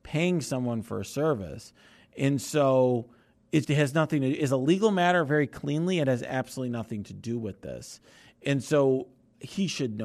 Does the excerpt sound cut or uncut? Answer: cut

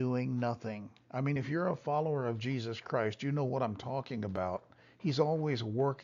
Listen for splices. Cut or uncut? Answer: uncut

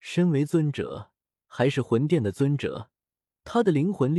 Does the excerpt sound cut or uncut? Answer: uncut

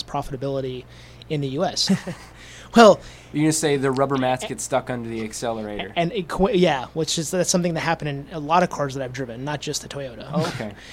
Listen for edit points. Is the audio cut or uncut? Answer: cut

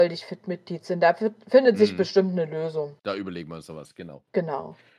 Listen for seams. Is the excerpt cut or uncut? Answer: cut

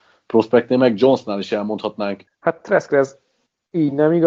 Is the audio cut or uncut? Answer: cut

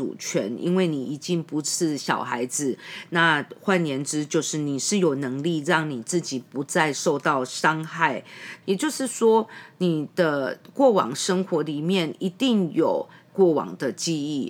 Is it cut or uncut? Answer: cut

